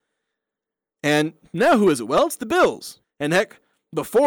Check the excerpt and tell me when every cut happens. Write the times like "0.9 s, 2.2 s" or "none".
3.0 s